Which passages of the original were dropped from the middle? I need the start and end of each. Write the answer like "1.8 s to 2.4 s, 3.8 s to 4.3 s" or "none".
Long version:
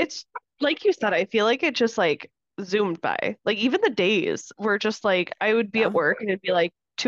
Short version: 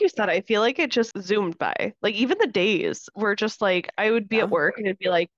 1.9 s to 2.5 s